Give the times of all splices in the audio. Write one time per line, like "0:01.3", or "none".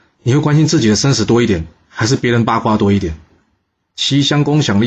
0:03.9

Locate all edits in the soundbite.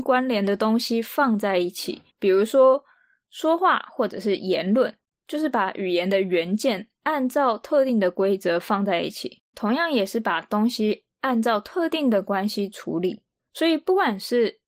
0:02.1
0:09.5

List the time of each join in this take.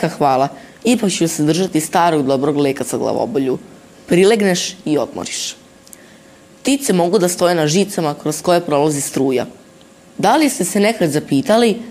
none

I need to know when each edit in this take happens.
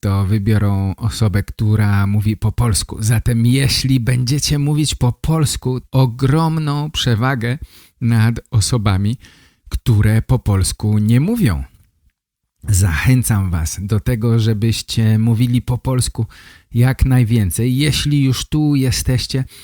0:05.8

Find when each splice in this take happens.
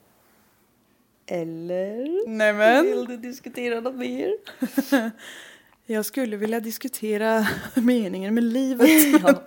none

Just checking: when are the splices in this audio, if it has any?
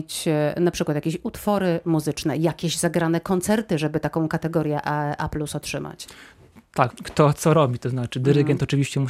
0:06.9

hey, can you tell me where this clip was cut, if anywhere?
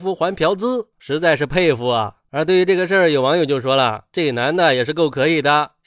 0:00.9

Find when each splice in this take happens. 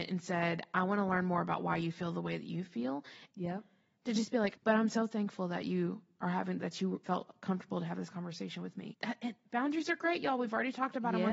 0:03.3
0:04.6
0:08.9

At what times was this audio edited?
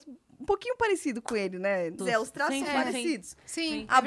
0:02.0

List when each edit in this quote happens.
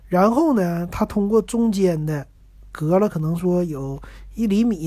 none

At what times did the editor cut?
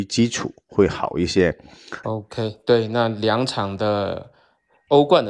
0:02.0

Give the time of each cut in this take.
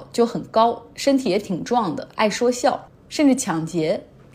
0:02.9

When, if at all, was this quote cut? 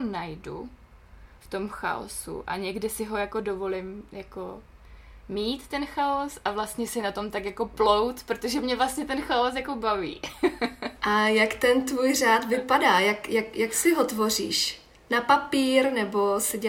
none

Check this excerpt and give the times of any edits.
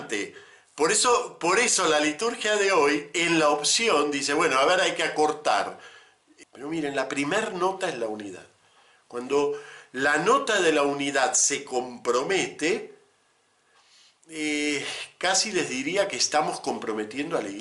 0:06.4

